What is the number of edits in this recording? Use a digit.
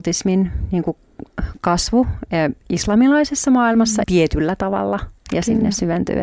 1